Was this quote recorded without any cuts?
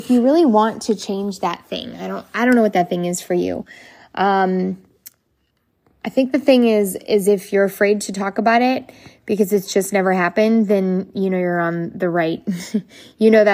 yes; 0 cuts

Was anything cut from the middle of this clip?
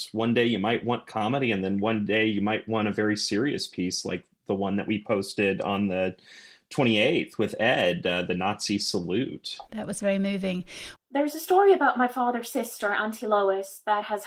yes; 2 cuts; at 9.7 s, 11.0 s

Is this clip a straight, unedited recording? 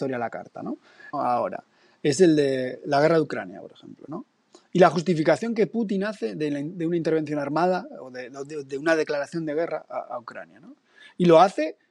no; 1 cut; at 1.1 s

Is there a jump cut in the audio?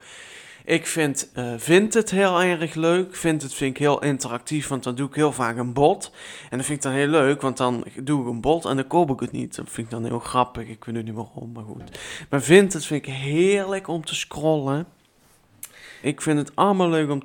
yes; 2 cuts; at 1.3 s, 16.0 s

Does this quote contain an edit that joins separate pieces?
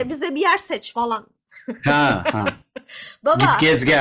no; 0 cuts

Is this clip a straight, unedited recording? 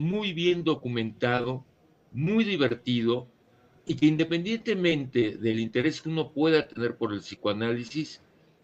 yes; 0 cuts

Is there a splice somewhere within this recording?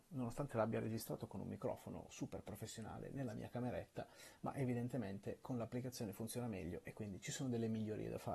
no; 0 cuts

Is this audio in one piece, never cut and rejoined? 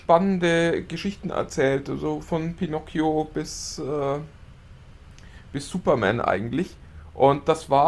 yes; 0 cuts

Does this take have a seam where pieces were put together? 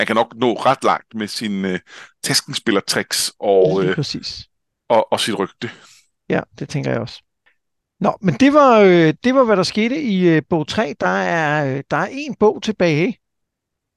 no; 0 cuts

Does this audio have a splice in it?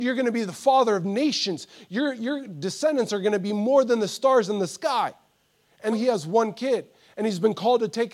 yes; 1 cut; at 5.9 s

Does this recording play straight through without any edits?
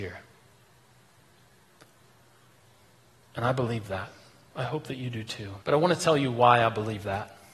no; 1 cut; at 5.6 s

